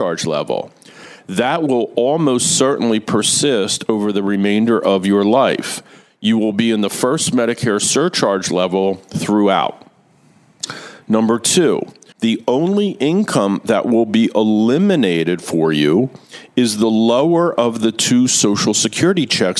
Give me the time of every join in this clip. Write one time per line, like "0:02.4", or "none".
0:12.1